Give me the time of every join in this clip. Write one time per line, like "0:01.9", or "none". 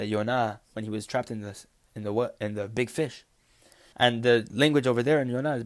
0:03.9

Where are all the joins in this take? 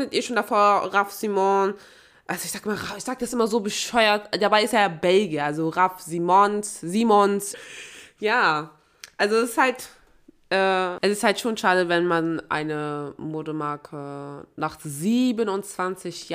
0:07.5

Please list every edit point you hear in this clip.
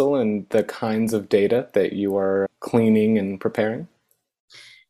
0:02.5

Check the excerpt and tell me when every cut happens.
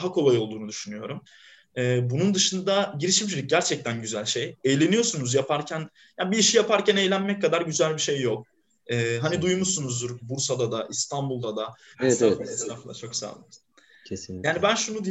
0:10.2
0:11.9

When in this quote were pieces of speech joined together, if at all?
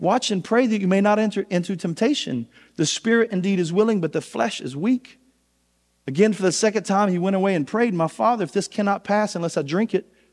none

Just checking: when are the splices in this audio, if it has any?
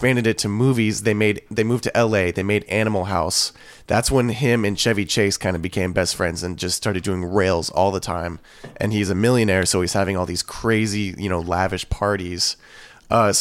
none

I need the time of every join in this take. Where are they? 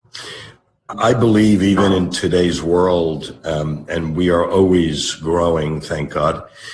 0:00.9

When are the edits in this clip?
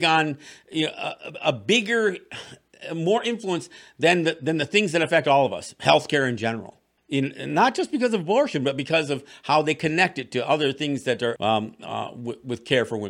0:07.0
0:11.4

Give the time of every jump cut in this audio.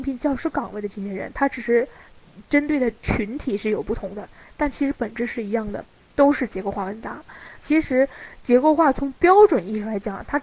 0:07.6

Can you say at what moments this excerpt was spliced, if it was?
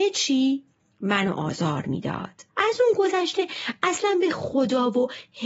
0:02.5

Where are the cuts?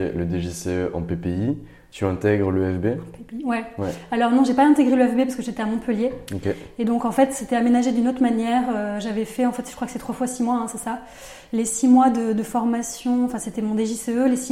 none

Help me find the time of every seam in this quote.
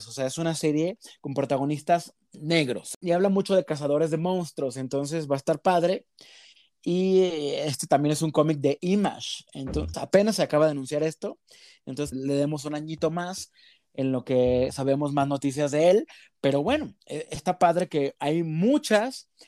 0:09.9
0:12.1

